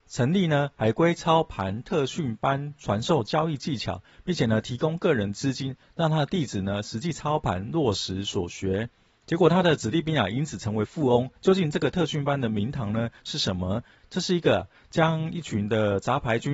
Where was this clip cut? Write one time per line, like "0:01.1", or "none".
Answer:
none